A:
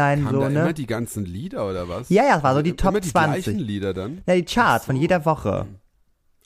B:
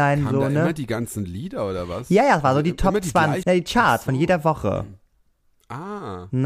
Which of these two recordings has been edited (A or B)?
B